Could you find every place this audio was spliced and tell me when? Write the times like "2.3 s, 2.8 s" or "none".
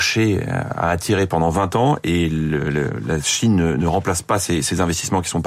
none